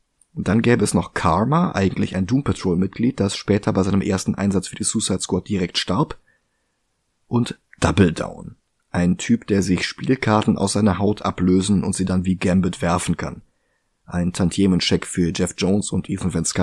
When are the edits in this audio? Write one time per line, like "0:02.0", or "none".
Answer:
none